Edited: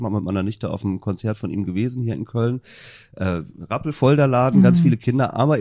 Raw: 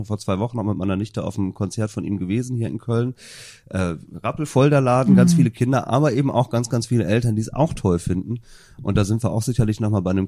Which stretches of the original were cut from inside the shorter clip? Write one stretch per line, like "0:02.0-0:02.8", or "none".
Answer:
none